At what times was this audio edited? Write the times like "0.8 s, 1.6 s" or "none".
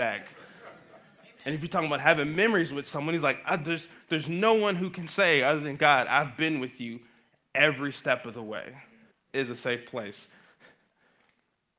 9.1 s